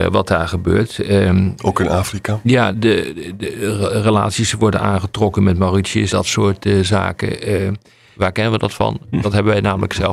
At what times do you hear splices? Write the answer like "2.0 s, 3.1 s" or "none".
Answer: 2.7 s, 6.1 s, 8.2 s